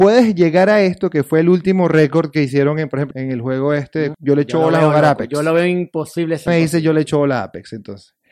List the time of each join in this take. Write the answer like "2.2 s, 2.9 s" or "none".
3.1 s, 4.1 s, 6.5 s